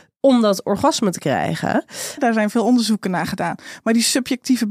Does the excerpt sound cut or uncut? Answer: cut